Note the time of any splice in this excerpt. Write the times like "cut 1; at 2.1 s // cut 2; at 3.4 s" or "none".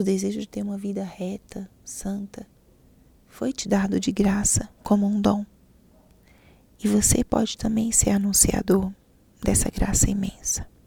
none